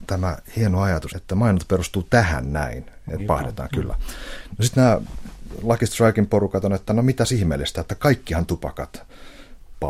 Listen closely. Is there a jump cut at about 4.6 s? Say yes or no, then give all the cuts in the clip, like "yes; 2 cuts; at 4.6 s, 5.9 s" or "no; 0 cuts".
no; 2 cuts; at 1.1 s, 3.2 s